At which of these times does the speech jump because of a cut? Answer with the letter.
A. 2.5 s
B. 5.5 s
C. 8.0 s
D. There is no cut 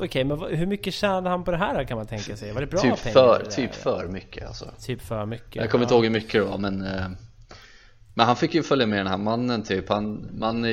D